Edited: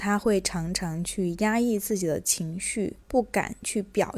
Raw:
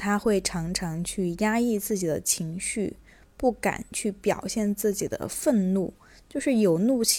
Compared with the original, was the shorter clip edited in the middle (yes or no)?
yes